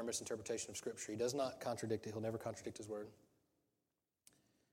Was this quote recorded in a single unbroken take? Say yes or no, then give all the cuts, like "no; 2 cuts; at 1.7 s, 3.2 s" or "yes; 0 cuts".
yes; 0 cuts